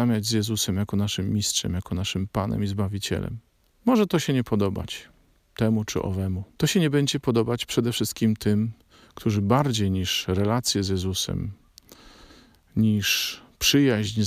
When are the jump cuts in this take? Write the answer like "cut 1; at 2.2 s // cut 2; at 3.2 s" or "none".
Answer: none